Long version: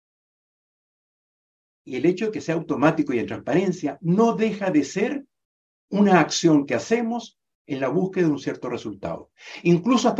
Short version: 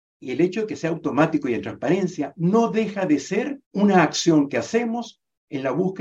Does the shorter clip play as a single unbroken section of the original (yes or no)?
no